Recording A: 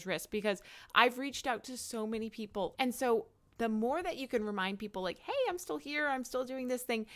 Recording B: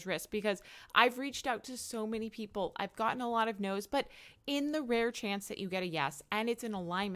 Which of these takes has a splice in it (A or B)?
A